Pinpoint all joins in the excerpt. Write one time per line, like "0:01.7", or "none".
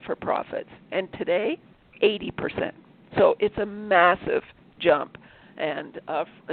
none